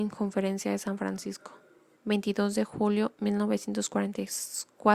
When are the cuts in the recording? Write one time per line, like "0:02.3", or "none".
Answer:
0:01.9